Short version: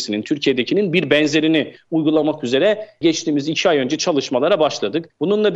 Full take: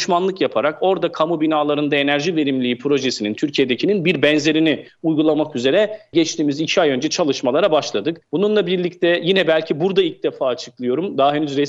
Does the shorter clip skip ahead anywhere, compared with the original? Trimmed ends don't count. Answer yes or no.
no